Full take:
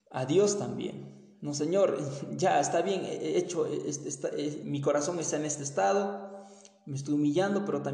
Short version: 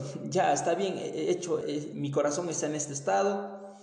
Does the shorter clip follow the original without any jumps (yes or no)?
no